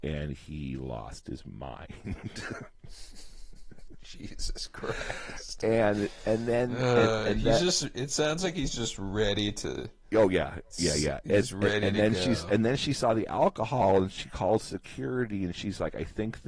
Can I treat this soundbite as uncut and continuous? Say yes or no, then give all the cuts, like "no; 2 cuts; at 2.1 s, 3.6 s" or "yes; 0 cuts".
yes; 0 cuts